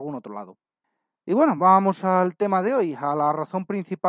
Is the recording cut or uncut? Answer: uncut